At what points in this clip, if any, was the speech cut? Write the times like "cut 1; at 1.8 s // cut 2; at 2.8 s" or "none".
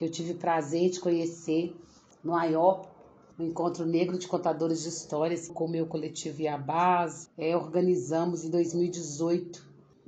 cut 1; at 5.5 s // cut 2; at 7.3 s